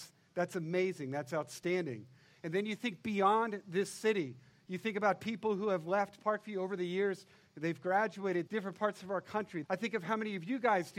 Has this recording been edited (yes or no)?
yes